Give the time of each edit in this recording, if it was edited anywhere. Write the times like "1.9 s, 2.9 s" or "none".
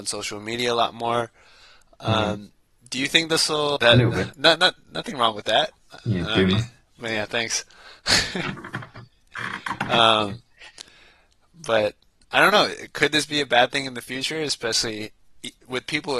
3.8 s